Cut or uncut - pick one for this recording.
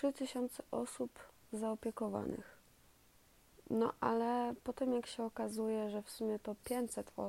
uncut